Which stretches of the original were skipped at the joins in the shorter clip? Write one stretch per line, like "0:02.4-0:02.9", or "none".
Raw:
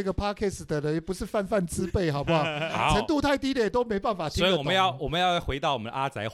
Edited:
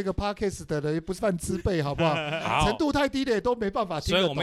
0:01.2-0:01.5